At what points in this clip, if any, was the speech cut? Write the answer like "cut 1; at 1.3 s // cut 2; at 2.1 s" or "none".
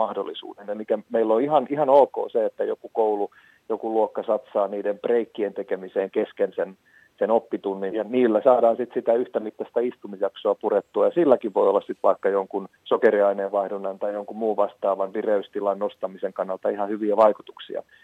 cut 1; at 7.9 s // cut 2; at 12.8 s